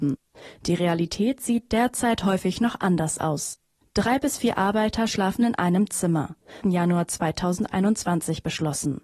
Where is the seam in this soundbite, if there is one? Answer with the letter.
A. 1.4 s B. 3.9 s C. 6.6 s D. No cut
C